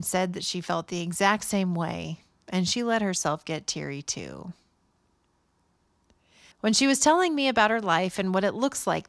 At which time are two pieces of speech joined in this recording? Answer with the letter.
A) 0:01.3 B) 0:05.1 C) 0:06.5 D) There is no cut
C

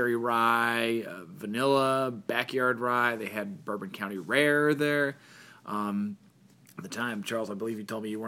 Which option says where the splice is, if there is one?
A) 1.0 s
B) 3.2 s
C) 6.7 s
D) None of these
D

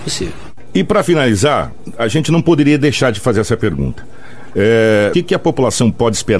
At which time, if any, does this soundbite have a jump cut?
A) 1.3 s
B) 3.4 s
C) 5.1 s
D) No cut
C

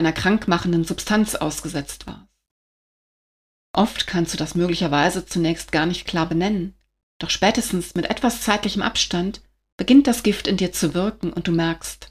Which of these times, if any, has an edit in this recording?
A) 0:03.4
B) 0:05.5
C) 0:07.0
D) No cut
C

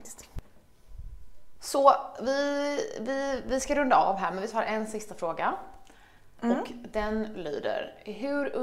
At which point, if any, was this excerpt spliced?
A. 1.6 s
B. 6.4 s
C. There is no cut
C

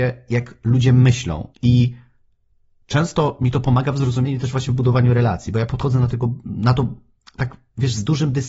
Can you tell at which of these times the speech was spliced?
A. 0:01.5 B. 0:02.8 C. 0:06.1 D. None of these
A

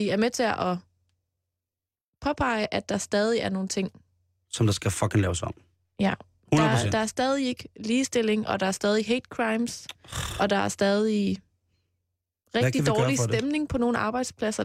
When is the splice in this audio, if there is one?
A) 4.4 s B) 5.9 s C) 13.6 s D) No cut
D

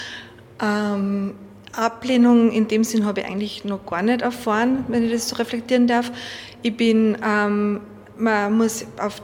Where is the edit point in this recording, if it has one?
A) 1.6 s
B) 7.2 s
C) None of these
C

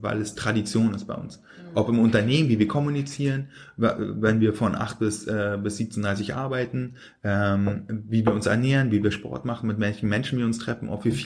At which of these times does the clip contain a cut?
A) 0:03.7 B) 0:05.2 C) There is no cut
C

